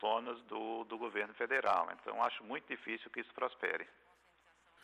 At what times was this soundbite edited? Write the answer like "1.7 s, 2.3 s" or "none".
none